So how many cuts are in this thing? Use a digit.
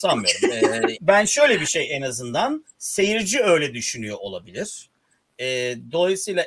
1